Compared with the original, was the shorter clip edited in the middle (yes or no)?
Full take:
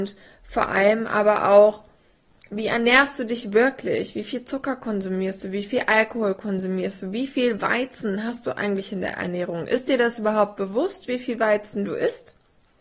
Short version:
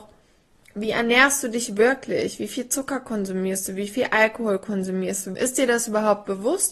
yes